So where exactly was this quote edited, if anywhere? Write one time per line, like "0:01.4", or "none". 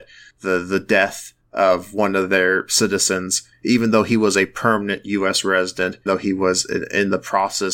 0:06.1